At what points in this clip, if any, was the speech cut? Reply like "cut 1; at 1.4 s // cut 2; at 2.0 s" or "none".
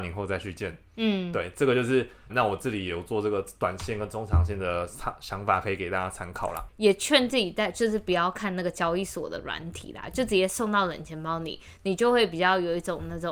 cut 1; at 2.3 s // cut 2; at 6.7 s